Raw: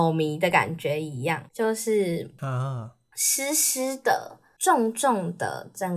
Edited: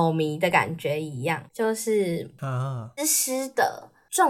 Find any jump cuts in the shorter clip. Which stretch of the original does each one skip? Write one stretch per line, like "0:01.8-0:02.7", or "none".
0:03.0-0:03.5